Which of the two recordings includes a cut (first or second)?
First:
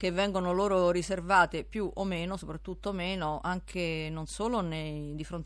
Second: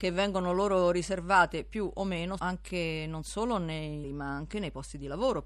second